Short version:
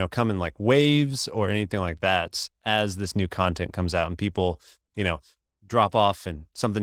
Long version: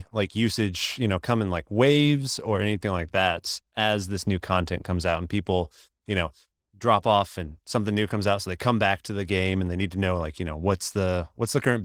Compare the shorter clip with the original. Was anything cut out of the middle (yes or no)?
no